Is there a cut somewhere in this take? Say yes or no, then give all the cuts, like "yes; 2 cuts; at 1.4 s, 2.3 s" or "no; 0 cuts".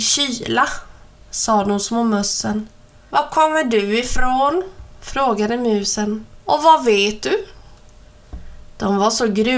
yes; 2 cuts; at 3.1 s, 6.4 s